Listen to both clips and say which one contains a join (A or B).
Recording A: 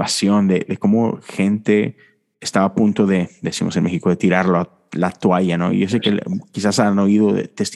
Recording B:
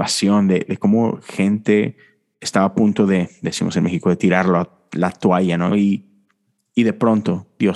B